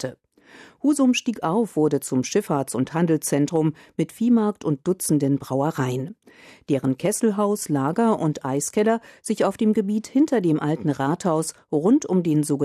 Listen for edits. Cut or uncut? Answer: uncut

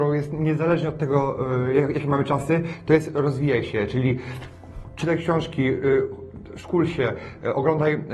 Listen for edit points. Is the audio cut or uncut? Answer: uncut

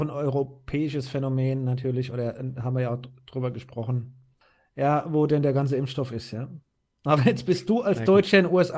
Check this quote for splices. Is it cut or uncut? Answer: uncut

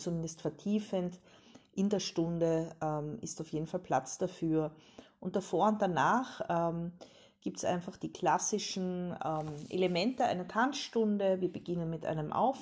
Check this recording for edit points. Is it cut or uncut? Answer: uncut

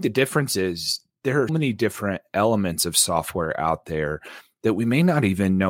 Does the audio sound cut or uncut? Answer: cut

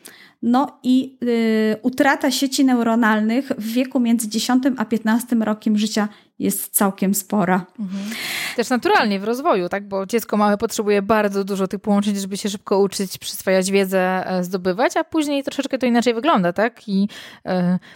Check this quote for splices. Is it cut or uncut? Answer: uncut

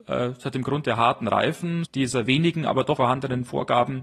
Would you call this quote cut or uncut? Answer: cut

